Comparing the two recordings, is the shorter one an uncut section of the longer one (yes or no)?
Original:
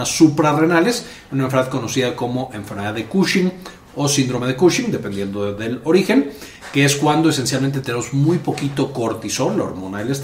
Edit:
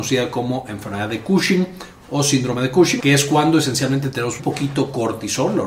no